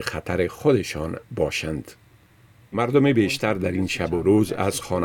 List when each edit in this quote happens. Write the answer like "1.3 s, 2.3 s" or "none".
2.7 s